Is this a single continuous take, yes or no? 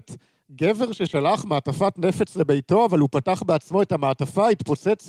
yes